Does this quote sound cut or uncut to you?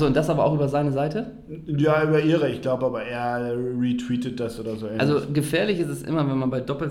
uncut